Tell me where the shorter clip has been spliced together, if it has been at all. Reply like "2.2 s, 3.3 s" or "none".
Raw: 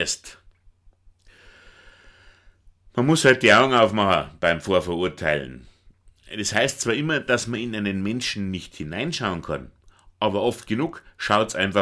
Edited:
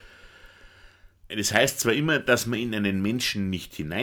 1.3 s